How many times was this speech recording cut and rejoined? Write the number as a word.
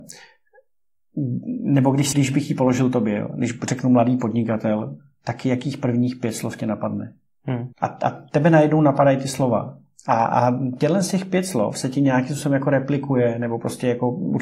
two